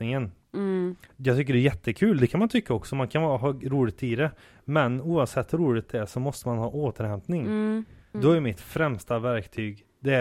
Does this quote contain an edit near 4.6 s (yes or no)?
no